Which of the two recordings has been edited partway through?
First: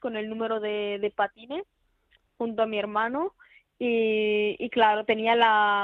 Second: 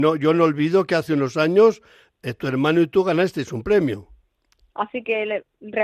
second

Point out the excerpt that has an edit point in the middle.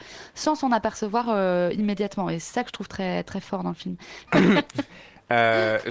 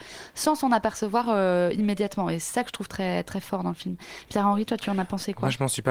first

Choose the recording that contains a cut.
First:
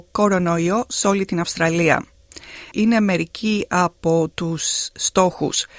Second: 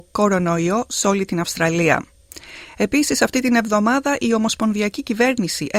first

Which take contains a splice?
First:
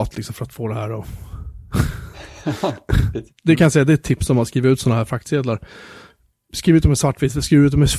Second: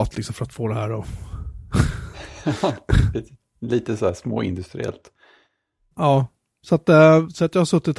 first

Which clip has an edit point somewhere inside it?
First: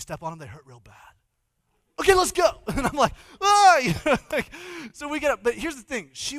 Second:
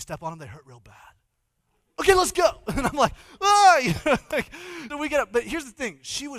second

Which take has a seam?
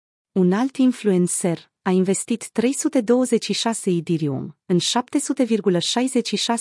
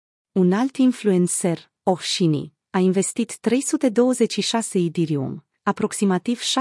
first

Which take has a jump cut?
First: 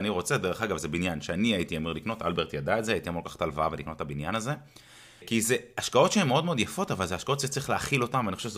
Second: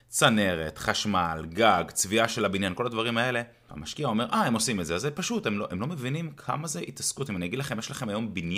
second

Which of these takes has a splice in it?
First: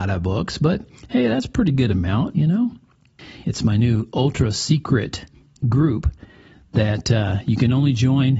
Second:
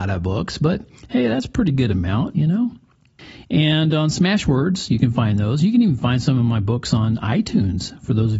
first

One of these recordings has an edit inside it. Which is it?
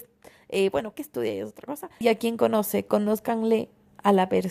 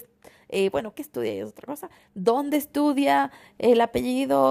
first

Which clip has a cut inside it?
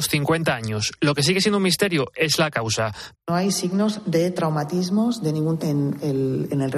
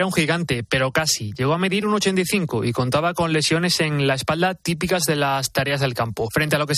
first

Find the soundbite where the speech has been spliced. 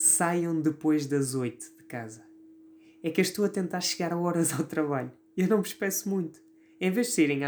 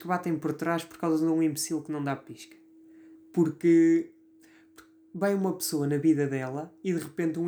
second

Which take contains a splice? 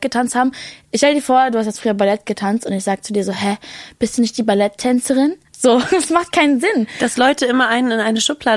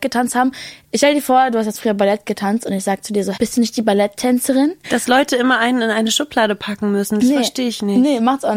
second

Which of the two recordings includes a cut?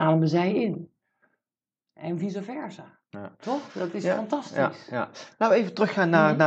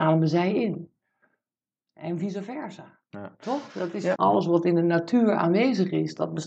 second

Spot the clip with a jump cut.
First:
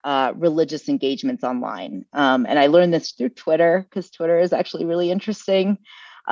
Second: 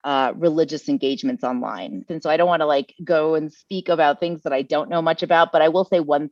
second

